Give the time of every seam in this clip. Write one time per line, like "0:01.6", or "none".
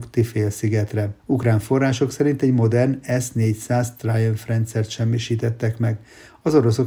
0:01.2